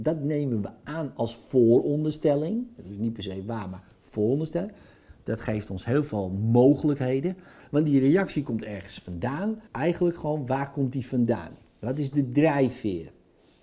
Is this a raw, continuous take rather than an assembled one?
no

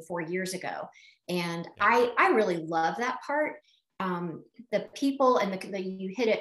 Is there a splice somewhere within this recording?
no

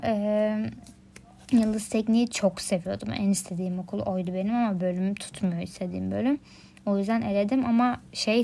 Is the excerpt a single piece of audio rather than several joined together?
yes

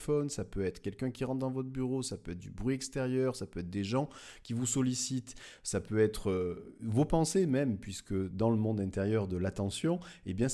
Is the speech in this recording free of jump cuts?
yes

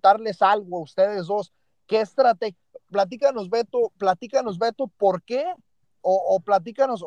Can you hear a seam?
no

